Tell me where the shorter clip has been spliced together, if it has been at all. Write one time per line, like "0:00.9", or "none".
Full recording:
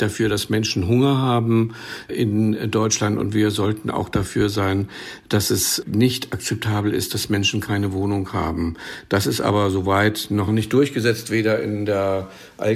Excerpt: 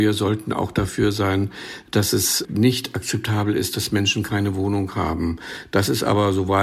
none